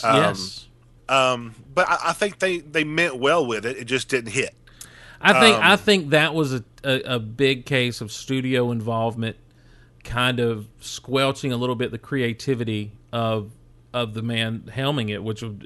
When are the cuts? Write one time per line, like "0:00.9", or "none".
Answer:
0:01.0